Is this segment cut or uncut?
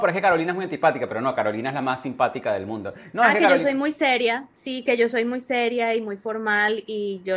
uncut